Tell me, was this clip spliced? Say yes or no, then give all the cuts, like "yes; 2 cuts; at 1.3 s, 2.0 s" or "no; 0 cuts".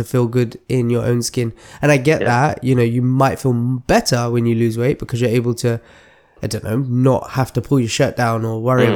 no; 0 cuts